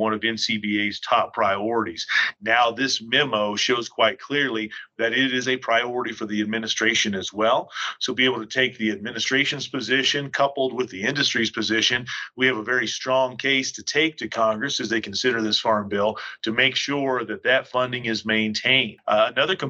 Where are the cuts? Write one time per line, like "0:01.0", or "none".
none